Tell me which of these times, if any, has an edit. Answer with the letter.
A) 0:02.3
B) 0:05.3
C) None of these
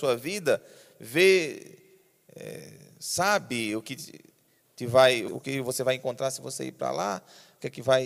B